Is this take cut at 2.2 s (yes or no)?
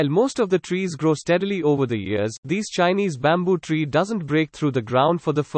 no